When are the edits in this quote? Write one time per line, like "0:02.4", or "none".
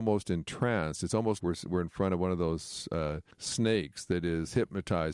0:01.4
0:03.3